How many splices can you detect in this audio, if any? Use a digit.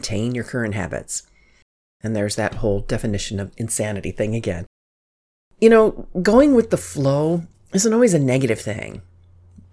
0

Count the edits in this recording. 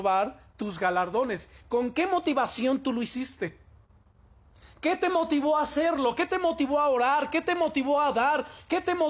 0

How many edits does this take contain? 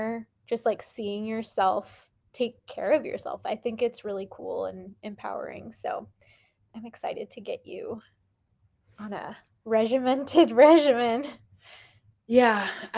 0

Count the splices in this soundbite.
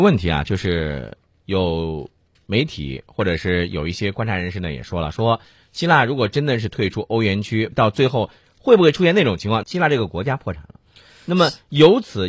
2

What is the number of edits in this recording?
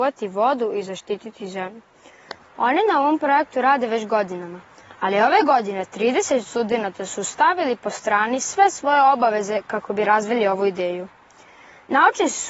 1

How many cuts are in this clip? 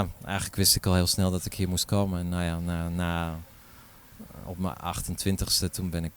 0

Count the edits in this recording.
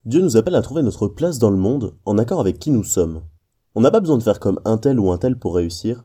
0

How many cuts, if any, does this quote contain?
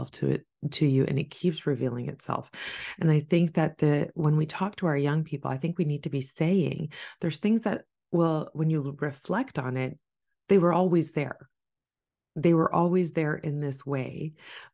0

